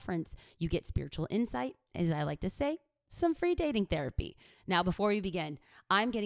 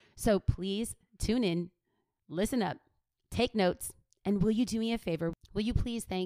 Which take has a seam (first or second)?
first